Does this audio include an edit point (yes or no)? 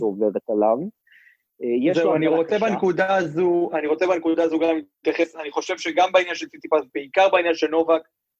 no